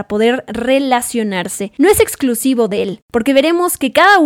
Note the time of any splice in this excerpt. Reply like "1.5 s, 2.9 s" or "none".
none

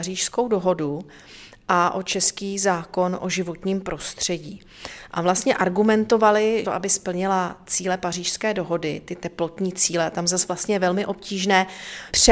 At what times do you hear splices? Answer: 6.6 s

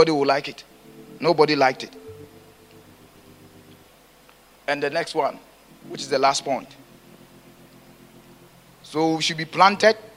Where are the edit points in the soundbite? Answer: none

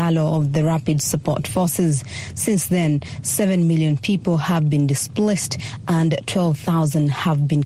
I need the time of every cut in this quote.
none

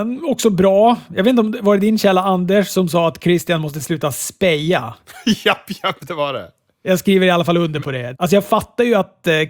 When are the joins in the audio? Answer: 6.0 s, 8.1 s

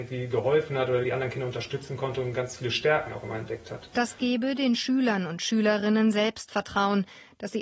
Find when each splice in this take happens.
none

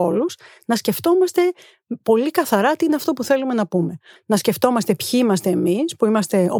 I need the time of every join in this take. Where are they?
4.2 s

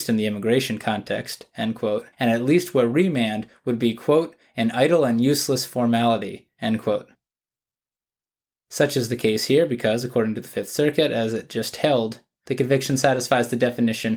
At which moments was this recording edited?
2.1 s

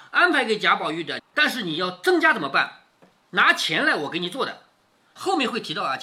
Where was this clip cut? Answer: 1.2 s

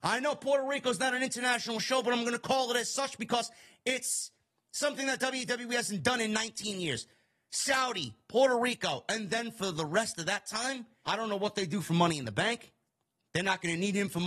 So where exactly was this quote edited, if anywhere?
11.0 s

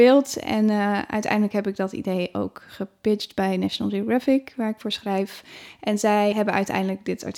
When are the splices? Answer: 6.3 s

